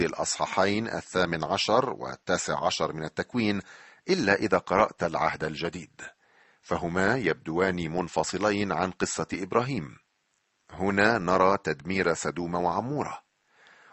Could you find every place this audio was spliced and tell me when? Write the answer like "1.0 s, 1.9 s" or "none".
none